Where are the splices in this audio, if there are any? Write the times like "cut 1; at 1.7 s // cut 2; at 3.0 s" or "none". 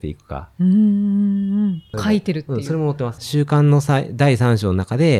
cut 1; at 1.9 s // cut 2; at 3.2 s